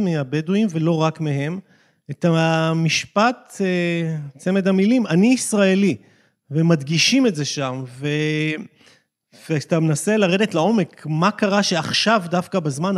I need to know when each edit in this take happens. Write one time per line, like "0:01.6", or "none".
none